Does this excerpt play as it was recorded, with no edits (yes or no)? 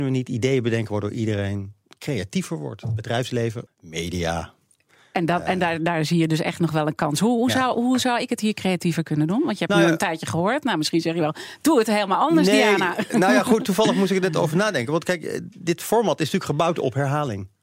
no